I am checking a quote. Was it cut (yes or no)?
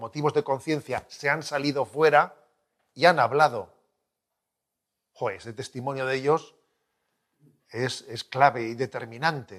no